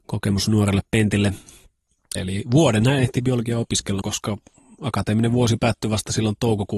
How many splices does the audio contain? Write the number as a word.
two